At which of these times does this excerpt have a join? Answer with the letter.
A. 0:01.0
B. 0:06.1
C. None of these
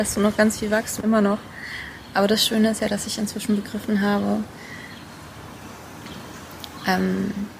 A